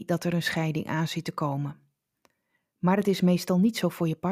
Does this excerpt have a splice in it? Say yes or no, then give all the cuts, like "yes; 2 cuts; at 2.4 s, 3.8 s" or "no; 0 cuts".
no; 0 cuts